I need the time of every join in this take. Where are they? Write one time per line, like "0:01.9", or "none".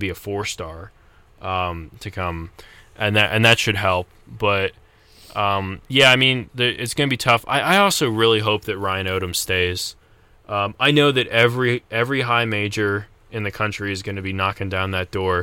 0:06.5

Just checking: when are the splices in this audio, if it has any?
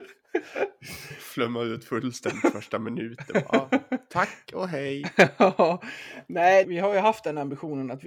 0:06.6

